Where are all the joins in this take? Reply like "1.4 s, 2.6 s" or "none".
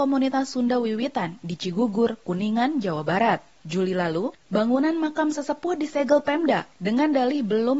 none